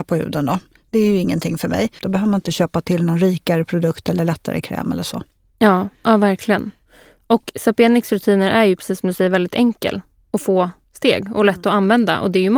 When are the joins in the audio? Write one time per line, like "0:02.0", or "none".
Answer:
0:02.0